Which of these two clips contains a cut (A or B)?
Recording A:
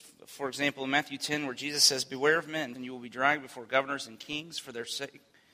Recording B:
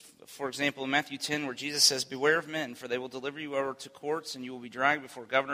A